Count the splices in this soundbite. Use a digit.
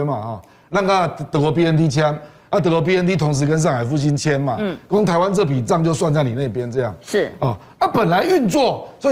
0